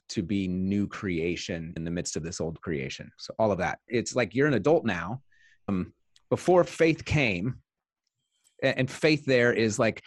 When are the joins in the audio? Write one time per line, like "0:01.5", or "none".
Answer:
0:01.8
0:03.9
0:05.7